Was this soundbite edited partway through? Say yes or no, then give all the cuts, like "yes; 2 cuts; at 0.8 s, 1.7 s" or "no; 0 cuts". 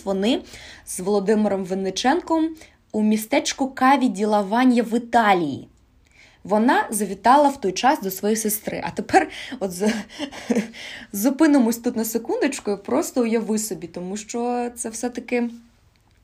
no; 0 cuts